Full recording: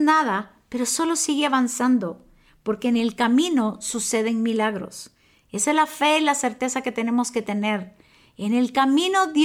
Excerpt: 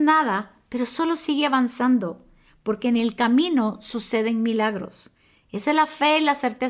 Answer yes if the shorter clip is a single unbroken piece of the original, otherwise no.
yes